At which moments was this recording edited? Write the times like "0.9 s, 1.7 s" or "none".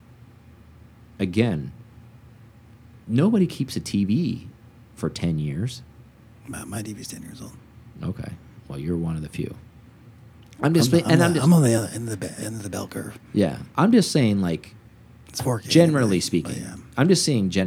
none